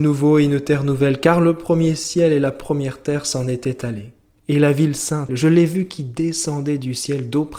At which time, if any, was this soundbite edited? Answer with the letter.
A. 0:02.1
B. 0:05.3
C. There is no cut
B